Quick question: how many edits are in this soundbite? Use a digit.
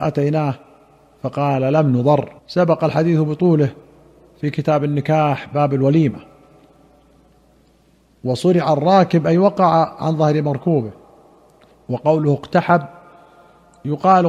1